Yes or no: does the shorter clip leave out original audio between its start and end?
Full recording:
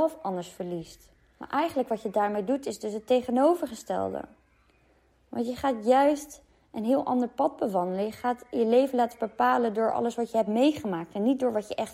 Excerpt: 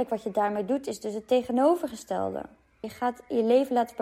yes